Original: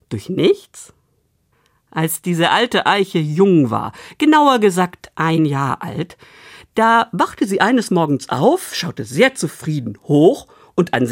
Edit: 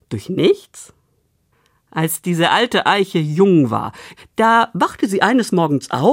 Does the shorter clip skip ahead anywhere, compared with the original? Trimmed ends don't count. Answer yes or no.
yes